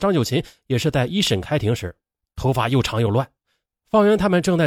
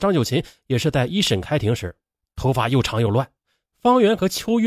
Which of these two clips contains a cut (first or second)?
first